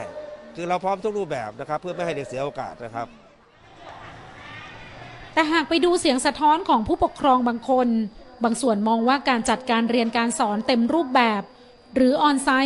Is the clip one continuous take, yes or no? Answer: yes